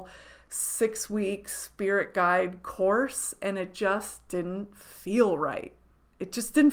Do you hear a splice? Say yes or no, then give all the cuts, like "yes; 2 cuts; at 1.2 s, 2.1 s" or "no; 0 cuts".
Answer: no; 0 cuts